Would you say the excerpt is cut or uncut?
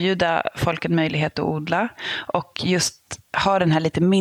uncut